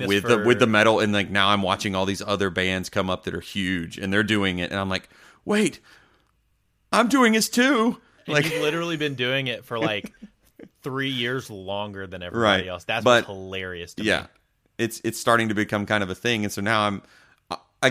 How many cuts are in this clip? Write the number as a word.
one